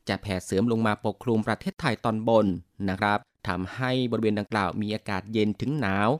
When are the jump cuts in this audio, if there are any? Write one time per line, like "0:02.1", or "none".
none